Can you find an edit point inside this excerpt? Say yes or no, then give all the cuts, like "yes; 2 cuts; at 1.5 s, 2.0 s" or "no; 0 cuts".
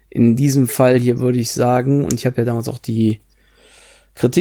no; 0 cuts